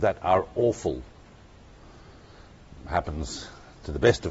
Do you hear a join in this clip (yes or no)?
no